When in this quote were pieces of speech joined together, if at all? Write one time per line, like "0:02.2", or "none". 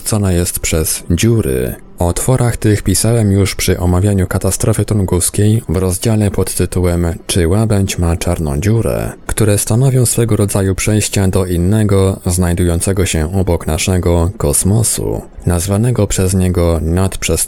none